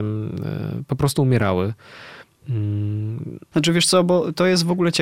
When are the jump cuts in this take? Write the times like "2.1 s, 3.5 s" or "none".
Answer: 3.5 s